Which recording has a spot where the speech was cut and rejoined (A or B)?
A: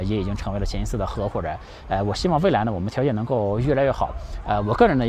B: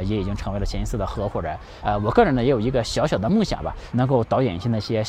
B